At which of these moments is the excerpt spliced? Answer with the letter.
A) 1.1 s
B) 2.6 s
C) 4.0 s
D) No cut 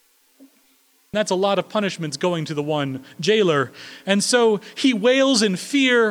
A